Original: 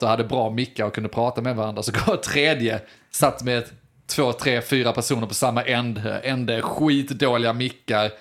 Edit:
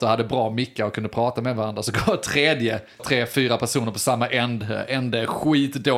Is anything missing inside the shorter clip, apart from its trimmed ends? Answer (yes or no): yes